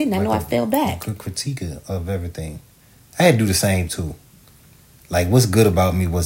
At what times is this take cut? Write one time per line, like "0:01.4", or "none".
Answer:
none